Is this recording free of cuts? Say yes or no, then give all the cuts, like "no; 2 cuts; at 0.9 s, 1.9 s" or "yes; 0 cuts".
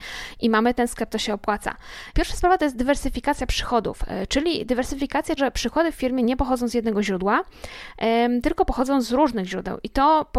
no; 2 cuts; at 2.1 s, 5.4 s